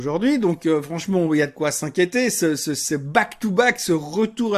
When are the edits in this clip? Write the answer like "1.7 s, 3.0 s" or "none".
none